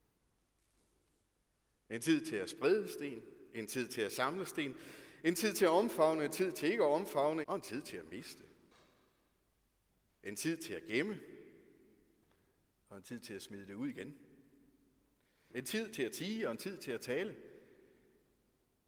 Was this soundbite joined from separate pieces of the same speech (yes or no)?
yes